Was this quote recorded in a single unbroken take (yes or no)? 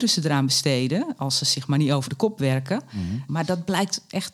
no